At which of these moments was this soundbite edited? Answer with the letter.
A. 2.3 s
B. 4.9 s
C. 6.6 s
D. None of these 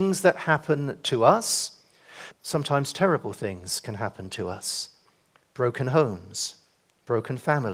A